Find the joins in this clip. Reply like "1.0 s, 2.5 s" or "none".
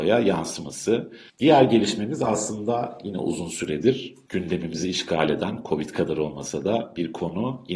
1.3 s